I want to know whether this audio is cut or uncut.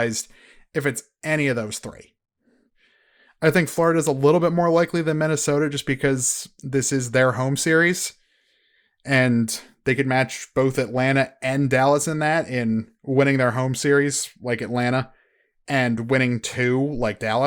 uncut